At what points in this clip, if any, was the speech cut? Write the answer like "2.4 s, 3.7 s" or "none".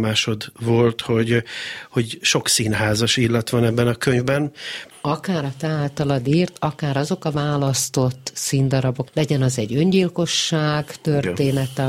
4.9 s, 9.1 s